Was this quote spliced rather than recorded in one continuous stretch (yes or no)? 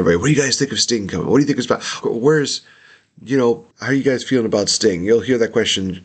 yes